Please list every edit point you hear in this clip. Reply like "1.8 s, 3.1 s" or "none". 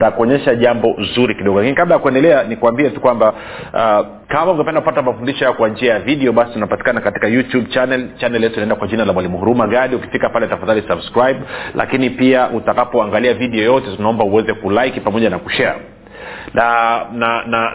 4.2 s